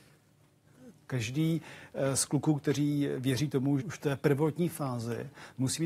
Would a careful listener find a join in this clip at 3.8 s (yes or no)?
yes